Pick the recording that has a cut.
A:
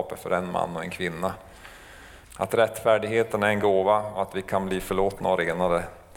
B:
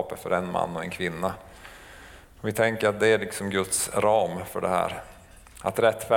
A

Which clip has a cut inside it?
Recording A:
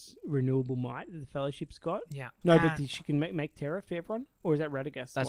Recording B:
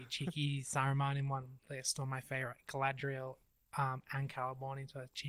A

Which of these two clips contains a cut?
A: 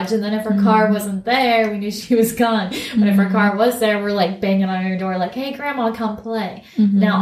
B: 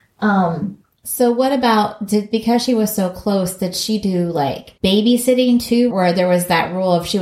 B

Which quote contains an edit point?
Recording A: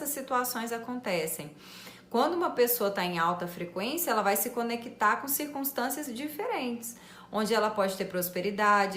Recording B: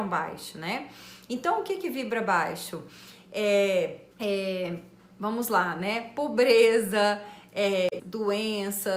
B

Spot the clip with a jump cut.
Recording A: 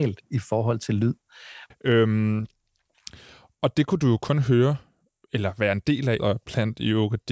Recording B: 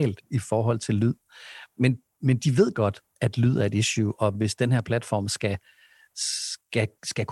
A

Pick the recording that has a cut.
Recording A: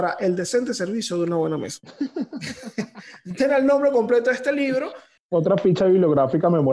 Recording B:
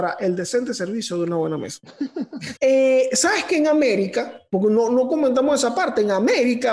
B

